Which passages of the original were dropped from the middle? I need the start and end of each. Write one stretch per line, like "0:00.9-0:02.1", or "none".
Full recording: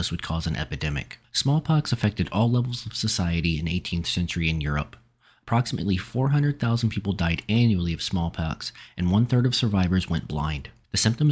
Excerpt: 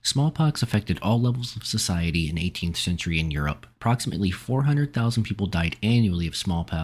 0:05.0-0:05.4

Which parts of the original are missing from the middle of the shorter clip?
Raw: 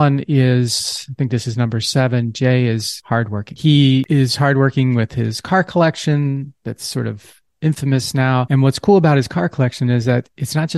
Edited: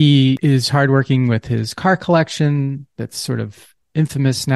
none

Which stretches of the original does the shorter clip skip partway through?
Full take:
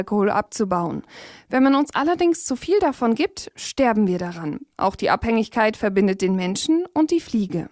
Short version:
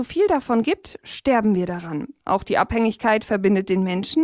none

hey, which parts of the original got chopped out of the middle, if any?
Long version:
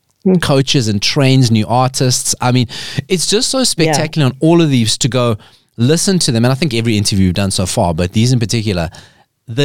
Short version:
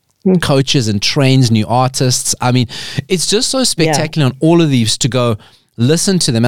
none

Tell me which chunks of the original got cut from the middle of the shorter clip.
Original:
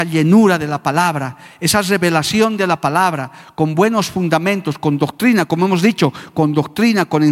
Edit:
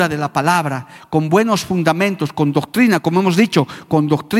0:01.5-0:03.4

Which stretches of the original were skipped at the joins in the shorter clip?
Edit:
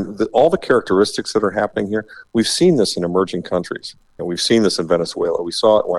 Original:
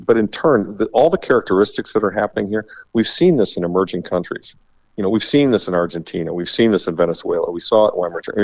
0:04.8-0:06.3

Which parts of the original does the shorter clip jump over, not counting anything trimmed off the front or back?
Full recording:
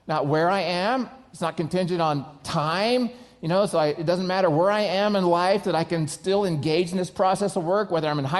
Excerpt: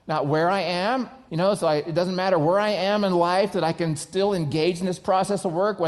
0:01.3-0:03.4

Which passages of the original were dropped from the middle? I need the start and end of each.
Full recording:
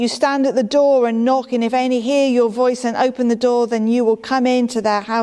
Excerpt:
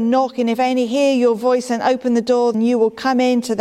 0:03.7-0:03.8

